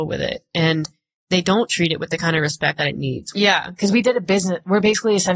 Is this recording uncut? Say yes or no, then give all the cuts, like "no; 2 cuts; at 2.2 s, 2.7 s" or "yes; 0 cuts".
no; 1 cut; at 3.3 s